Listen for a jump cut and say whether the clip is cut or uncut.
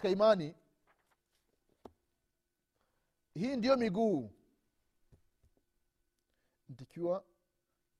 uncut